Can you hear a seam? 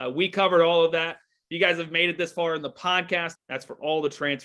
yes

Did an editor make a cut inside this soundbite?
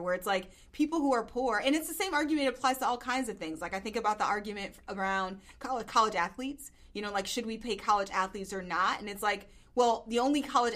no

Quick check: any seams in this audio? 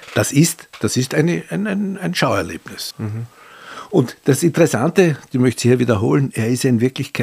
yes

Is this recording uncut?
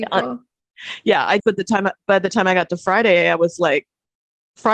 no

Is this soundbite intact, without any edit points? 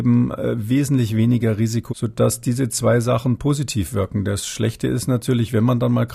no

